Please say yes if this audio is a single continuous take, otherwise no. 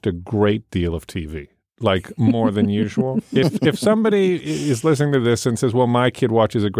yes